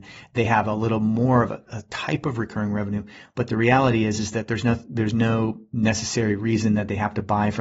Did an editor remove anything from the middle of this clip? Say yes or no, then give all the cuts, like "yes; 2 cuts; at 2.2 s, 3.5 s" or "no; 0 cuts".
no; 0 cuts